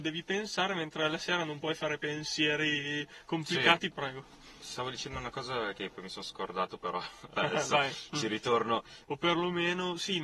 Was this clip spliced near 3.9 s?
yes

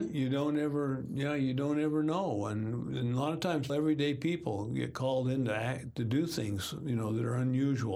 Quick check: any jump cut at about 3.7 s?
yes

